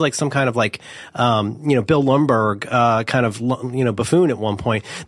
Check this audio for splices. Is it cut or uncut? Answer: uncut